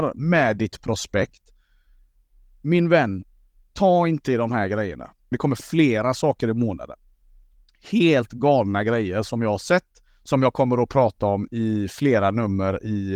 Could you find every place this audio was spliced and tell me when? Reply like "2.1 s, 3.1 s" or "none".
5.3 s